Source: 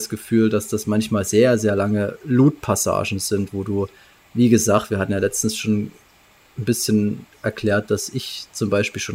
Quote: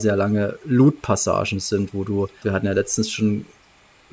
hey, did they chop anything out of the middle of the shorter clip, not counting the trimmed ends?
yes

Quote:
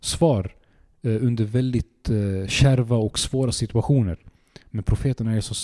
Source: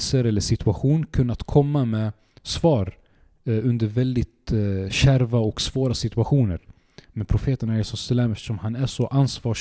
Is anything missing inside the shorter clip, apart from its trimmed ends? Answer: no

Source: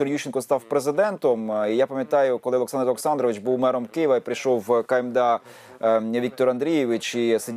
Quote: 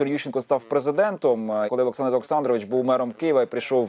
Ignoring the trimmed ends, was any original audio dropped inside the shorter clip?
yes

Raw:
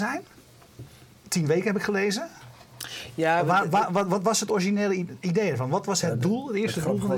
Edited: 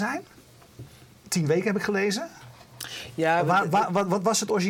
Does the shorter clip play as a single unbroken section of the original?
yes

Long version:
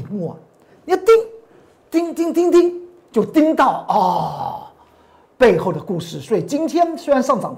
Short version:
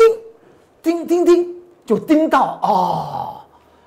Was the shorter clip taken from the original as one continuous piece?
no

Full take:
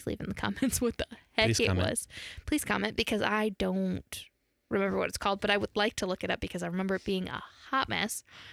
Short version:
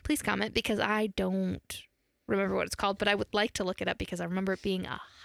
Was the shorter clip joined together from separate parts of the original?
no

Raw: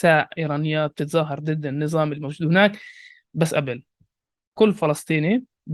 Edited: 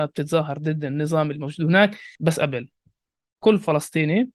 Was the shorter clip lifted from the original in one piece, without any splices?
no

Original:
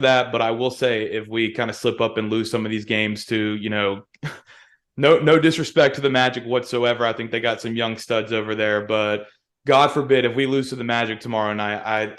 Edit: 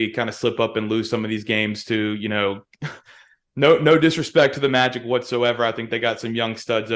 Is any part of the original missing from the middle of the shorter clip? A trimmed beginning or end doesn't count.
no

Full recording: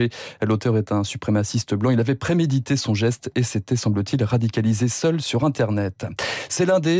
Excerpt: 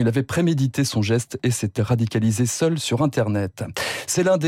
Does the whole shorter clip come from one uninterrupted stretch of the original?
no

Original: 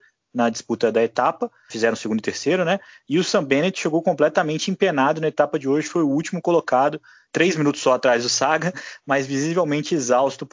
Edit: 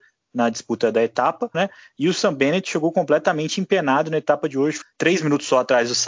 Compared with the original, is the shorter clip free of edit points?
no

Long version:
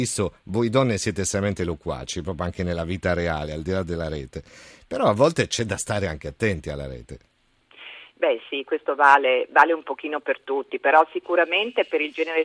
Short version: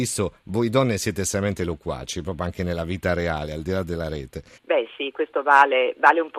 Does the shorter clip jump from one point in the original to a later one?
yes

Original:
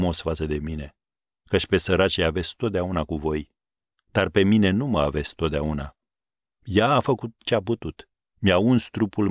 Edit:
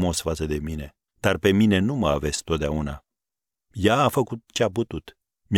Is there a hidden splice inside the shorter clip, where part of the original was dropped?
yes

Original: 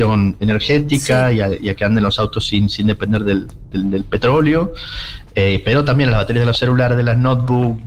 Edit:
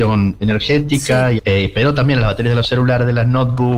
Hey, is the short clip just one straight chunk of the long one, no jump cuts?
no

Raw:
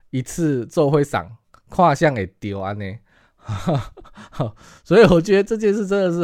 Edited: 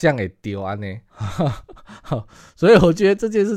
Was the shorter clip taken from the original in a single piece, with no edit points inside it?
no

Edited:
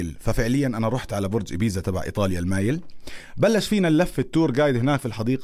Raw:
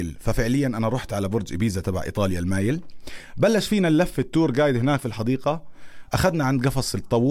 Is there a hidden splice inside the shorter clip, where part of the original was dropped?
no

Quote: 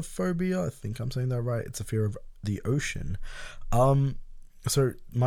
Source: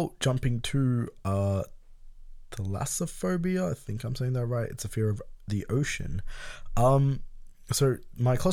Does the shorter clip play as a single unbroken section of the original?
yes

